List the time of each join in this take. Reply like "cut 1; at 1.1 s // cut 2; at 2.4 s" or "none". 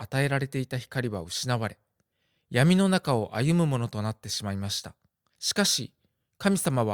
cut 1; at 5.3 s